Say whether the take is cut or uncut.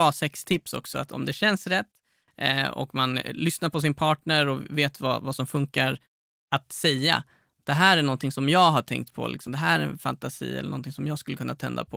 uncut